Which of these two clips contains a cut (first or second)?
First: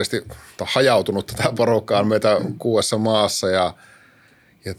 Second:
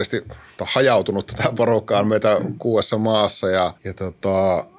second